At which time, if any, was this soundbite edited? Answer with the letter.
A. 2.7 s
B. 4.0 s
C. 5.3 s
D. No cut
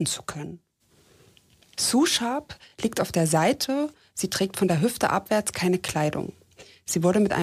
D